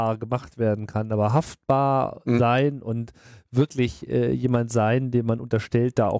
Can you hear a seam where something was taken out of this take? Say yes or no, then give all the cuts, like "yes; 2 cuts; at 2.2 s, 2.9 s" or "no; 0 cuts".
no; 0 cuts